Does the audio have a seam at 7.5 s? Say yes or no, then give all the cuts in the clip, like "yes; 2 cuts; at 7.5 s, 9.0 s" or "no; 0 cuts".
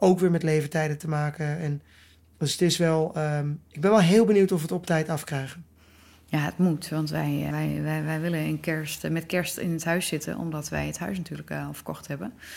yes; 1 cut; at 7.5 s